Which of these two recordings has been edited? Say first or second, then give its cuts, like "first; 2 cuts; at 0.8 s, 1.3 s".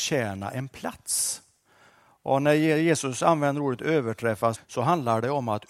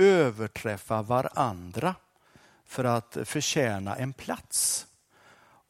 first; 1 cut; at 4.5 s